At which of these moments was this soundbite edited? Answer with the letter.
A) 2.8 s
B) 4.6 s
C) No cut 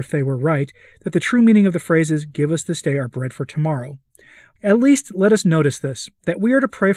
B